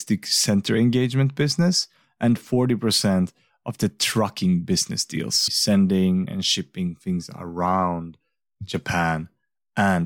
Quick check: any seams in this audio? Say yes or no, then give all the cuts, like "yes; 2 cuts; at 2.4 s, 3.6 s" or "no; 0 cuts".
yes; 1 cut; at 5.5 s